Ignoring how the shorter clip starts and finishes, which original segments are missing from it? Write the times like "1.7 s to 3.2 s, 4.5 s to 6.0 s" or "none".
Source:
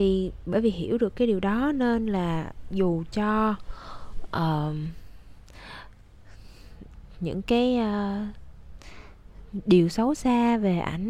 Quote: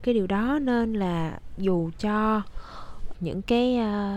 4.3 s to 7.1 s